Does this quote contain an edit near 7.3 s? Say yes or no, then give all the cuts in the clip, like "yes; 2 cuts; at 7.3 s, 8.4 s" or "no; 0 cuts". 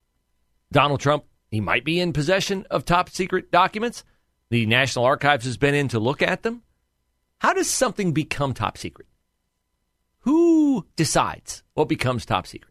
yes; 1 cut; at 7.3 s